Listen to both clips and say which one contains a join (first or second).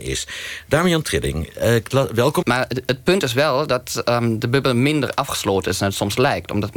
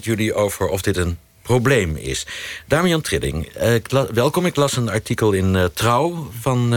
first